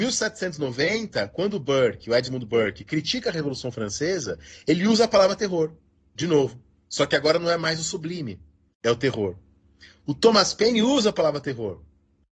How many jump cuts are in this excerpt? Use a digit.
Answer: 1